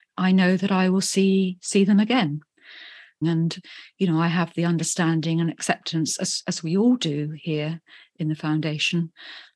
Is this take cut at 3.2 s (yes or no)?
yes